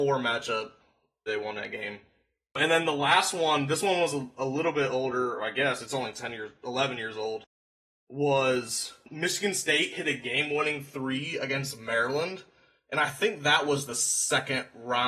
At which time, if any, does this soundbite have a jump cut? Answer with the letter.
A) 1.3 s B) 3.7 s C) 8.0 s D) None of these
A